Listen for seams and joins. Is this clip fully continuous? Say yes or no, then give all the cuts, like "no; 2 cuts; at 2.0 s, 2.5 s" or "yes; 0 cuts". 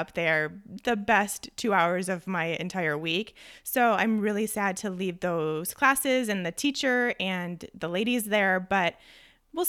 yes; 0 cuts